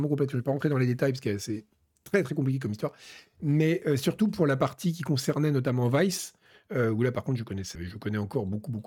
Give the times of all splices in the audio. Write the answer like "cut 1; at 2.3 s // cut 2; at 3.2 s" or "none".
cut 1; at 7.8 s